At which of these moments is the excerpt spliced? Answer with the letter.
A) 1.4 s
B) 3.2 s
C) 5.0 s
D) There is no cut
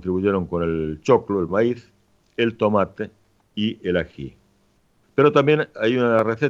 C